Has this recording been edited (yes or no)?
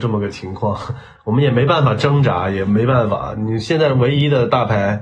yes